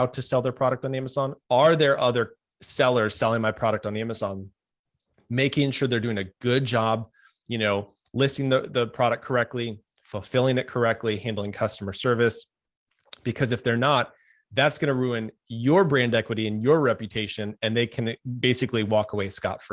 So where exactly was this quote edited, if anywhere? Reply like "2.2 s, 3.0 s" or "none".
1.4 s